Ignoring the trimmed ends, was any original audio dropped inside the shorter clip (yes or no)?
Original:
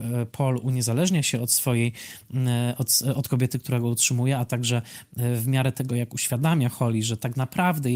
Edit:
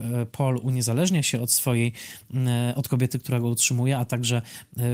yes